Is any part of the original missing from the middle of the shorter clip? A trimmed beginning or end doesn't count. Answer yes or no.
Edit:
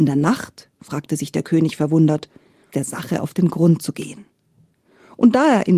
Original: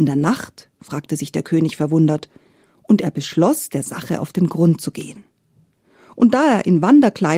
yes